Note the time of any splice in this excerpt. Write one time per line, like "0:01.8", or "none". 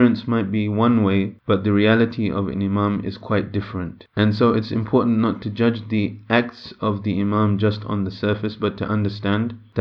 none